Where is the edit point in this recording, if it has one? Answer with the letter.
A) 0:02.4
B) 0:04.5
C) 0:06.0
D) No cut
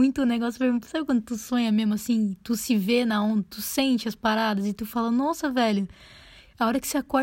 D